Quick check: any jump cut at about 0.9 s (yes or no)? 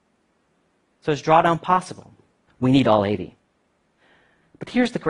no